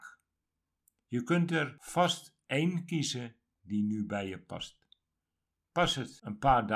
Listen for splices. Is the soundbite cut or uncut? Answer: uncut